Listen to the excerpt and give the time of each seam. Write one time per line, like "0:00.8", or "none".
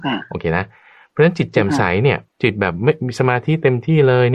0:02.3